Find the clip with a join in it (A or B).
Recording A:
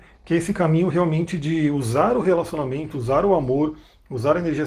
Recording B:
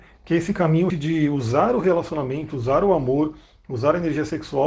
B